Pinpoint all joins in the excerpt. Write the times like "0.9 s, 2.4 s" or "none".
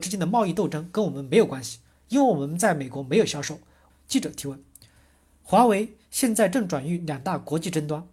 3.9 s